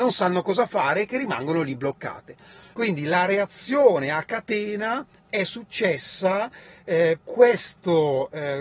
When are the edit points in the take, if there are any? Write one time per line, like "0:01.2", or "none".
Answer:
0:02.7
0:07.2